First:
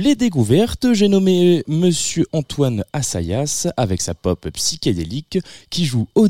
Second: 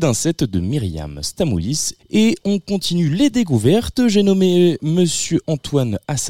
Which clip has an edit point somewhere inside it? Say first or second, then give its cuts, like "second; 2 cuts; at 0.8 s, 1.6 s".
second; 1 cut; at 2.0 s